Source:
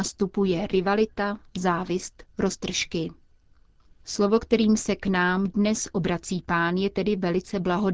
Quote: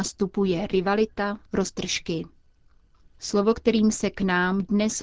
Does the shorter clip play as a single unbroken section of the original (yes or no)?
no